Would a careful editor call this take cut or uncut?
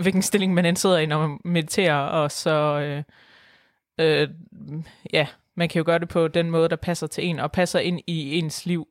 uncut